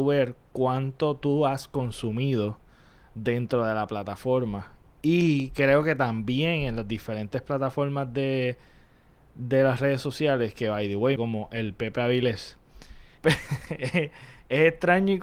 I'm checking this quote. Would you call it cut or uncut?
cut